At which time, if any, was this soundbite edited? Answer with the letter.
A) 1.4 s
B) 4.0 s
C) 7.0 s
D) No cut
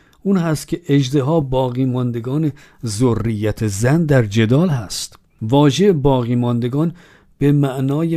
A